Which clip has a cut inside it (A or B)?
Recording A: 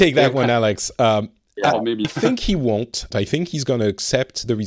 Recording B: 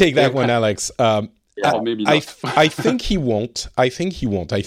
A